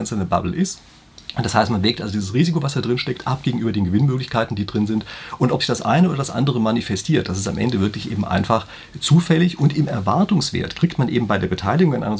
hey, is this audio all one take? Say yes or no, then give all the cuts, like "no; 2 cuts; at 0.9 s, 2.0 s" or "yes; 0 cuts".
yes; 0 cuts